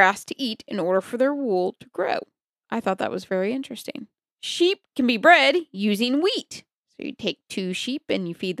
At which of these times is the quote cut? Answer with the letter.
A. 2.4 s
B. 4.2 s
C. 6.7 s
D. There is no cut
D